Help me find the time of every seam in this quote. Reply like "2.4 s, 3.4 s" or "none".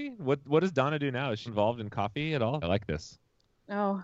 1.5 s, 2.6 s